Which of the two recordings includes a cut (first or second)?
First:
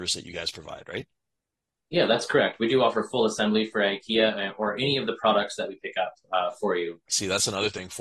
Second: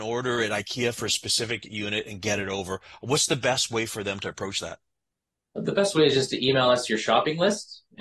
first